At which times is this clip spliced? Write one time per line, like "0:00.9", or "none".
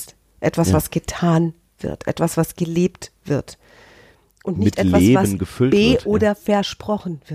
none